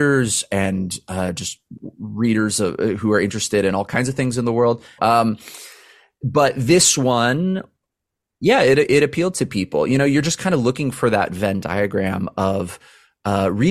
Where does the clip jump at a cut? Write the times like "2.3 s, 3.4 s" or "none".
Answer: 5.0 s